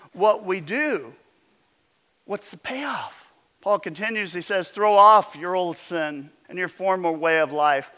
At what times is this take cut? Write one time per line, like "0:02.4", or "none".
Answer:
0:03.5
0:06.4